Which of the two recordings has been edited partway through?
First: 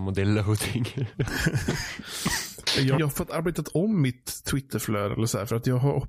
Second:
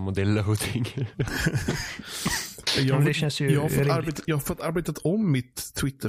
first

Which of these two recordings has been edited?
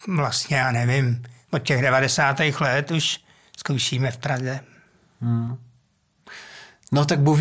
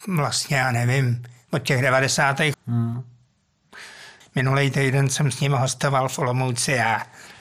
second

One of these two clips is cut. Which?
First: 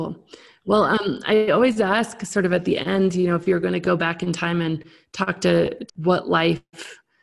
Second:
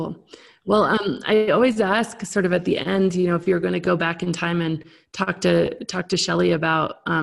first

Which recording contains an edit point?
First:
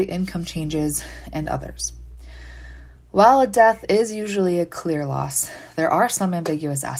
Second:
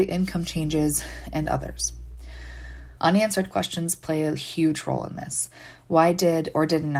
second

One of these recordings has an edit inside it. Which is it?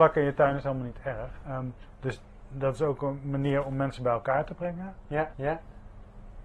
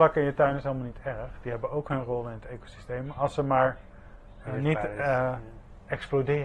first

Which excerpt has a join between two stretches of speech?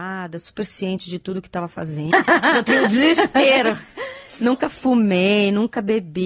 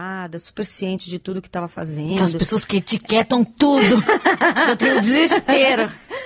first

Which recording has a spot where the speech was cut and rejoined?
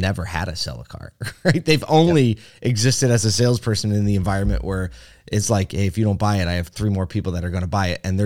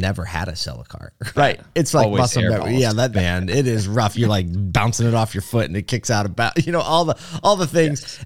second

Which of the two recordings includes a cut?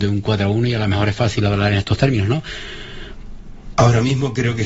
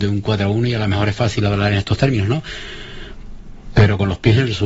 first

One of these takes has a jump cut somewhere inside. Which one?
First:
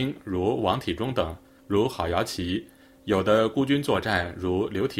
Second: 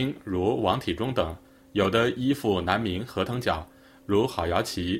first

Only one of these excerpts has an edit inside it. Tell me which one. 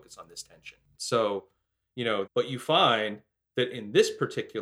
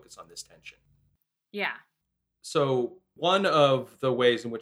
first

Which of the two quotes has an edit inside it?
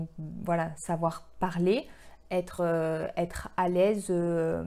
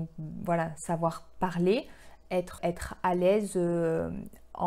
second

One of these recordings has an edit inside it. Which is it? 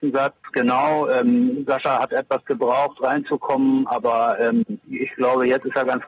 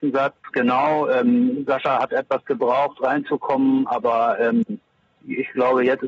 first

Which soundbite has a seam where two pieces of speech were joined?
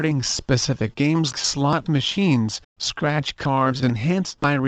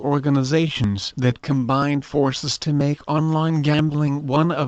first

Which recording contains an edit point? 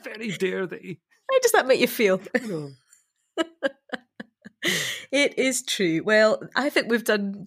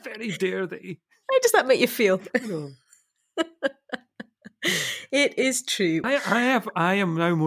second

